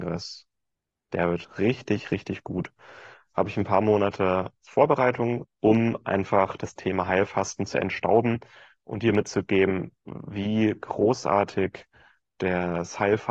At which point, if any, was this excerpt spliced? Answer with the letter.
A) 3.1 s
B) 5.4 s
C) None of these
B